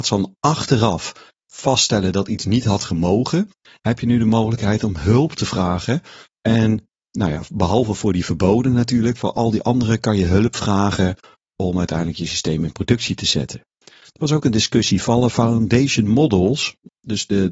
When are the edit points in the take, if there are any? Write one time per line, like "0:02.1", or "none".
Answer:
0:06.2